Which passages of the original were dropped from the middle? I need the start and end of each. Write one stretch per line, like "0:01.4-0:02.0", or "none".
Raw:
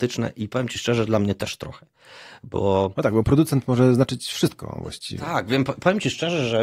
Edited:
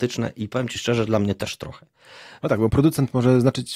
0:02.4-0:02.9

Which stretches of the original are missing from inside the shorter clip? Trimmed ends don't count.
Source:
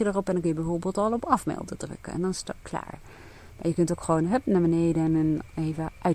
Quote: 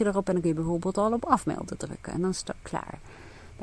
none

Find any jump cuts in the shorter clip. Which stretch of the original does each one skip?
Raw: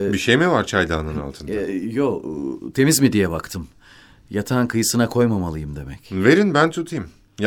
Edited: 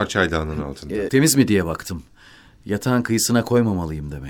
0:01.7-0:02.7

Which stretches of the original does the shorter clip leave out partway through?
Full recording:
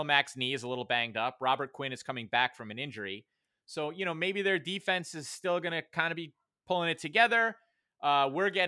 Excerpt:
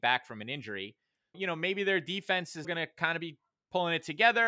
0:03.6-0:03.9
0:05.2-0:05.6

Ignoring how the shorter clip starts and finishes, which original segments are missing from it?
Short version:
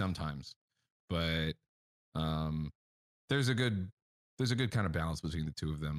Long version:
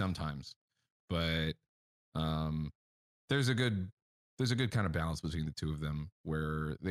none

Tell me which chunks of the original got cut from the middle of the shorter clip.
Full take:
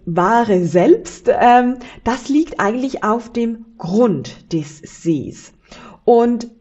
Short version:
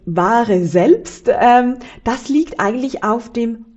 none

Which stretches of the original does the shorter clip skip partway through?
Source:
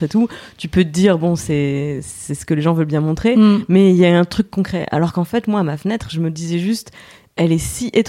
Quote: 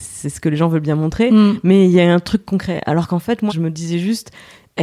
0:05.5-0:06.1

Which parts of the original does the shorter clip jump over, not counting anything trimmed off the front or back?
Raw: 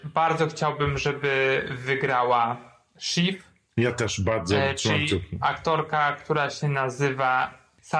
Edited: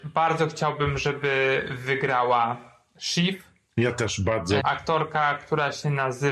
0:04.6-0:05.4

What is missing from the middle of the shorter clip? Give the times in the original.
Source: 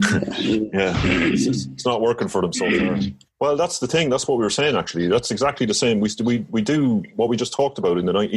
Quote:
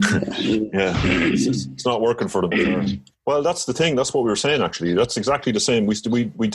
0:02.5-0:02.7

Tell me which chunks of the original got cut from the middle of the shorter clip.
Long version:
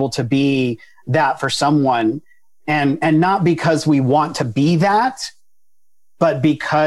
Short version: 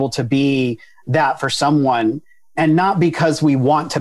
0:02.6-0:03.0

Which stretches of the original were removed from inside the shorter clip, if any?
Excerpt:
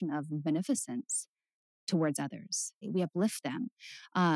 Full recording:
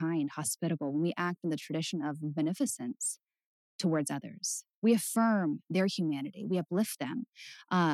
0:04.7-0:06.4

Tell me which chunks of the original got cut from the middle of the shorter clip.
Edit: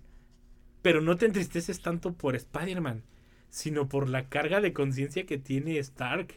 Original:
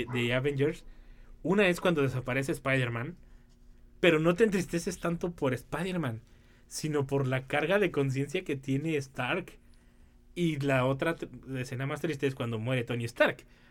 none

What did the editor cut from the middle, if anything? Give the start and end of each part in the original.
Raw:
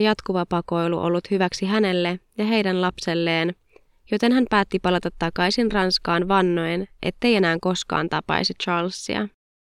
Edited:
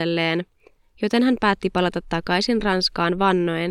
none

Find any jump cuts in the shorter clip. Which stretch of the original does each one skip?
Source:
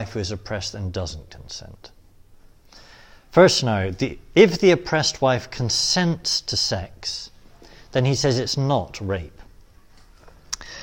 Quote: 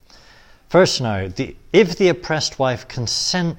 none

